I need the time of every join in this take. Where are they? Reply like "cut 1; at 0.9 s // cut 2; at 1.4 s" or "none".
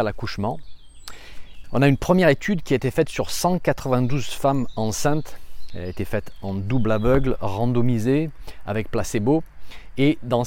cut 1; at 1.6 s